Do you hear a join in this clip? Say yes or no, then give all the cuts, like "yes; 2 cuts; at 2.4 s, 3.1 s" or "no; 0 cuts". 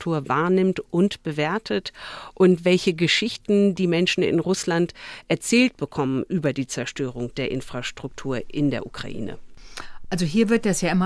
no; 0 cuts